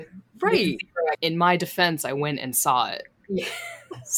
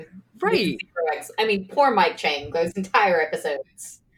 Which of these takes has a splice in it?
first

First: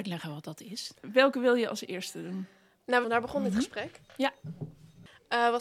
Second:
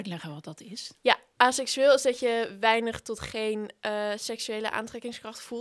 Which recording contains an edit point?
first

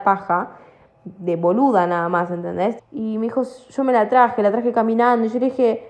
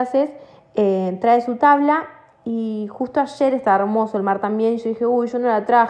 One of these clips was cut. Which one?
first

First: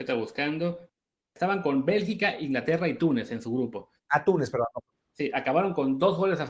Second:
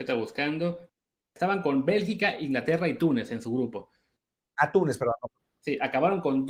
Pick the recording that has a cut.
first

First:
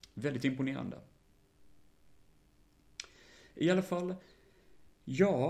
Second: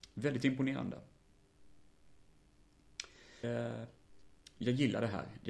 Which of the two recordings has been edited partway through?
second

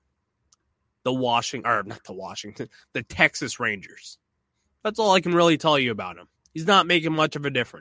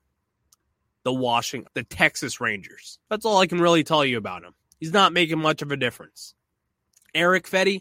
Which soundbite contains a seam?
second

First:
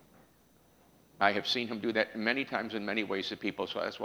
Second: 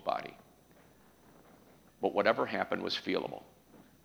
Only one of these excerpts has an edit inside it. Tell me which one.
second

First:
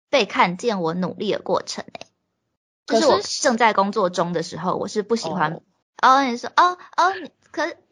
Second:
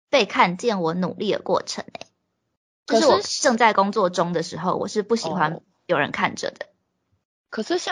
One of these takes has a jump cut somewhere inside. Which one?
first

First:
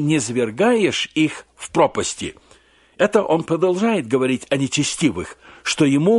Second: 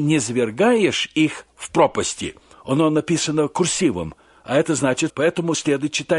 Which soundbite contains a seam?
second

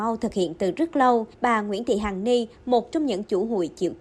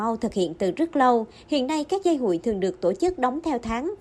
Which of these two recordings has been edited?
first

